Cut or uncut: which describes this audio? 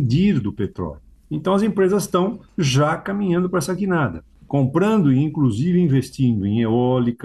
uncut